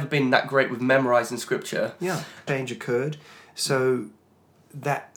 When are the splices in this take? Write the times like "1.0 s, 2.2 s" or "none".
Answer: 2.5 s